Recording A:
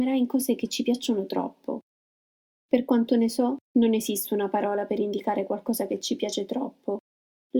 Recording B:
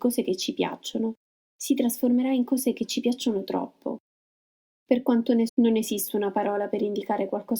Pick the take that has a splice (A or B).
B